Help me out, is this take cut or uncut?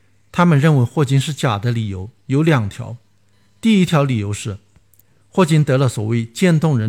uncut